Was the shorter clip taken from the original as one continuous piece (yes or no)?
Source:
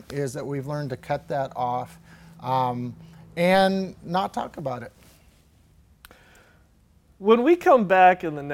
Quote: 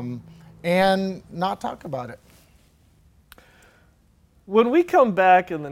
yes